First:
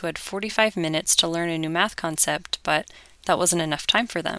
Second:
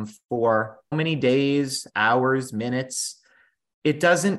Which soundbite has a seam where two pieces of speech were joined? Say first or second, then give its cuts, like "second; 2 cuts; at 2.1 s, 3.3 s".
second; 1 cut; at 0.9 s